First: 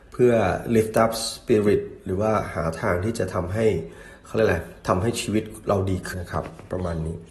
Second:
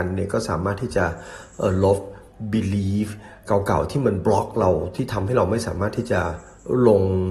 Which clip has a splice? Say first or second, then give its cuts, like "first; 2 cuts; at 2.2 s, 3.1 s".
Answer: first; 1 cut; at 6.1 s